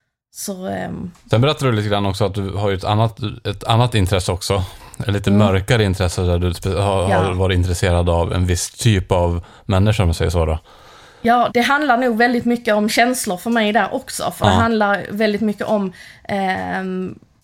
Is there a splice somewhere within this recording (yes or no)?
yes